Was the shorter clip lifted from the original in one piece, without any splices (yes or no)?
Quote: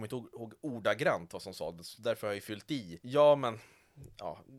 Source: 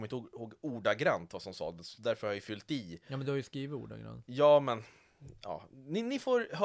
no